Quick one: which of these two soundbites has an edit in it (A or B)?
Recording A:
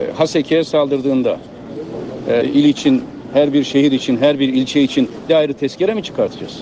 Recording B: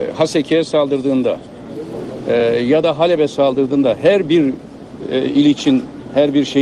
A